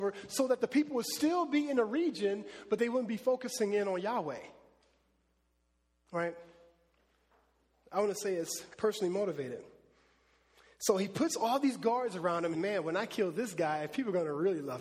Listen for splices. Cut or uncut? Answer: cut